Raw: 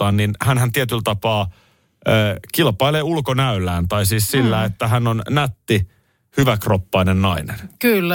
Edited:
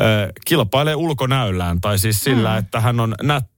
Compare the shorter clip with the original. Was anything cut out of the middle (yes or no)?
no